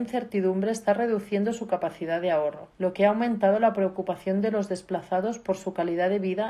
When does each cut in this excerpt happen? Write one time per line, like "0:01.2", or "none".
0:02.7